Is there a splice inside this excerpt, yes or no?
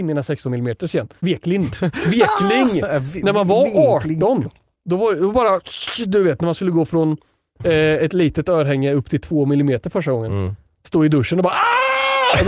yes